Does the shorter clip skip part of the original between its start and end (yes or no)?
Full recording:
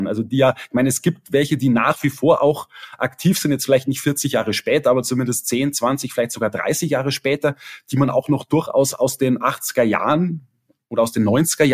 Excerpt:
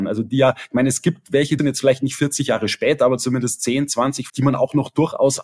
yes